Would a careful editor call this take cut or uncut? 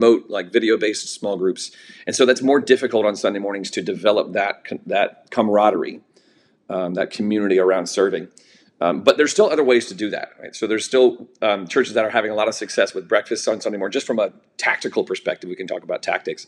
uncut